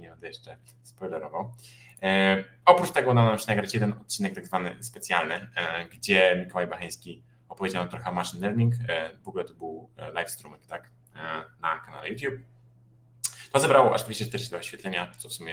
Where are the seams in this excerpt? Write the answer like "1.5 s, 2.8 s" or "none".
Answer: none